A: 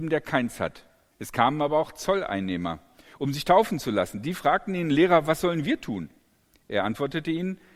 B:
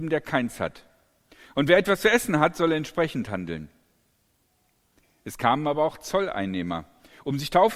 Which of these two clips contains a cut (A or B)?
A